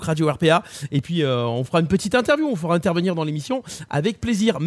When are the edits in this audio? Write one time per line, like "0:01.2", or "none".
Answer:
none